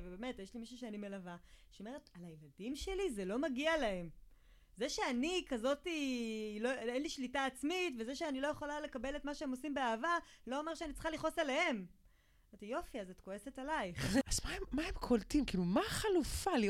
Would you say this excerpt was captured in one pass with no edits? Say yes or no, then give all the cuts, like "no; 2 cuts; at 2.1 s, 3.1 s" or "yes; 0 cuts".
no; 1 cut; at 14.2 s